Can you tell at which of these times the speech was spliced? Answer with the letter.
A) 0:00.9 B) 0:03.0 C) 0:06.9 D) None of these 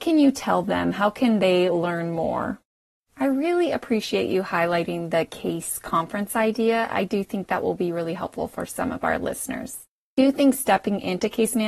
B